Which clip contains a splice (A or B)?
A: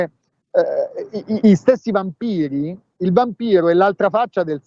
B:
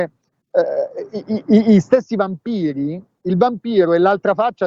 A